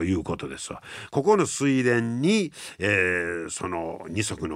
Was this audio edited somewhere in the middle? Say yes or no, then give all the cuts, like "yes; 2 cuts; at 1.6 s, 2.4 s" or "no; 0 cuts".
yes; 1 cut; at 1.1 s